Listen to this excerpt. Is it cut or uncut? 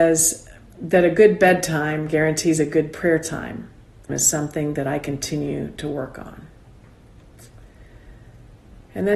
cut